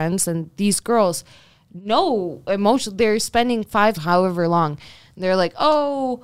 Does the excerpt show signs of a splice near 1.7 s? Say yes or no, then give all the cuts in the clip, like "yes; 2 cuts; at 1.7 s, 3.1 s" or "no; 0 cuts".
no; 1 cut; at 3.9 s